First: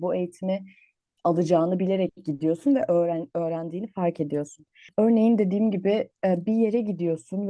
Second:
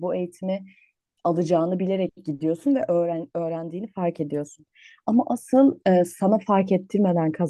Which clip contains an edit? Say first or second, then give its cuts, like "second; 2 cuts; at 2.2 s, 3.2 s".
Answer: first; 1 cut; at 4.9 s